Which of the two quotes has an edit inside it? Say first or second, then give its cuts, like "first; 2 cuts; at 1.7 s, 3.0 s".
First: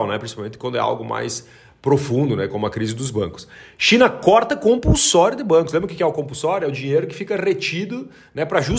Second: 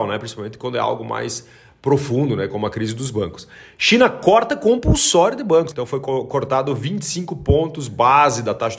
second; 1 cut; at 5.7 s